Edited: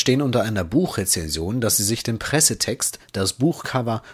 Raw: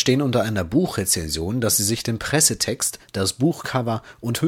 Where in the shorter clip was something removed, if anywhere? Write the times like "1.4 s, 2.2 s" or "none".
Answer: none